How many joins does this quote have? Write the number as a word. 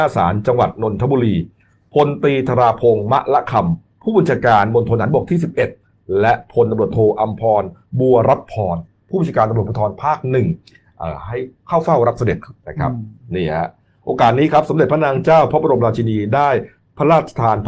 one